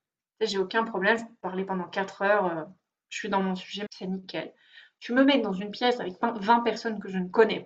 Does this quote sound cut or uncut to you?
cut